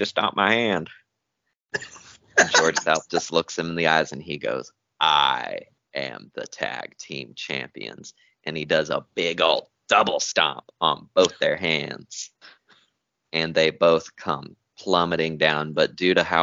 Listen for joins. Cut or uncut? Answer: uncut